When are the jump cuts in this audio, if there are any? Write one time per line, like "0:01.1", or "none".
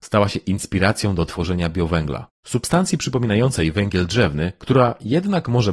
none